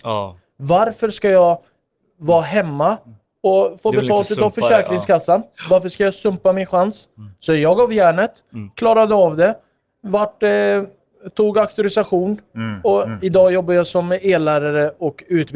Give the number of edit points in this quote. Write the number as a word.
zero